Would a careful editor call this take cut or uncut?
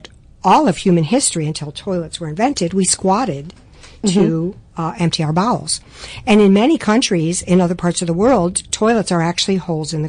uncut